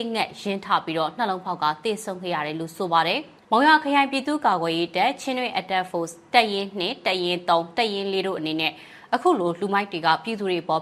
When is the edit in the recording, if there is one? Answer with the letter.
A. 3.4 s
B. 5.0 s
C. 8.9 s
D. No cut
A